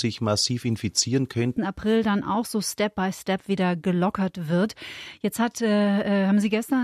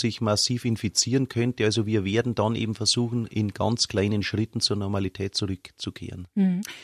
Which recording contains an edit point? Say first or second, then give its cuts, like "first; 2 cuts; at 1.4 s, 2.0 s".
first; 1 cut; at 1.6 s